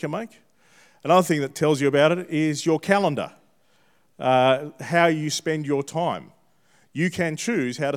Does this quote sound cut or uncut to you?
uncut